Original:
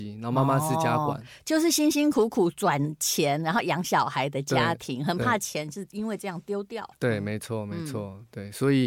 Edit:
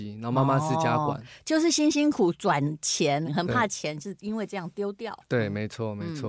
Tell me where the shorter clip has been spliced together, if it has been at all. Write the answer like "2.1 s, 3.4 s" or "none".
2.1 s, 3.2 s